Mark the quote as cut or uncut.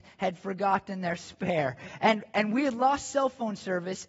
uncut